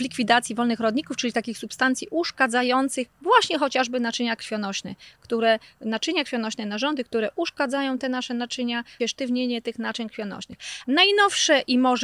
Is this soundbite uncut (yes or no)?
no